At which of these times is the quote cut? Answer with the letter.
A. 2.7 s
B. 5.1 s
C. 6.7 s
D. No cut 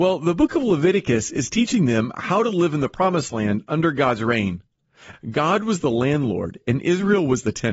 B